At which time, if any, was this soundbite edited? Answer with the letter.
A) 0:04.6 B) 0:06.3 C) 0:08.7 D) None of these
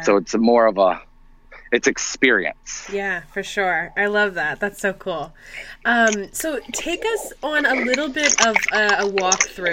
D